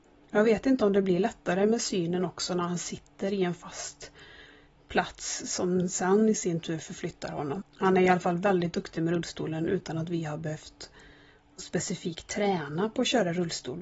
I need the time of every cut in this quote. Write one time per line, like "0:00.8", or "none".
0:07.6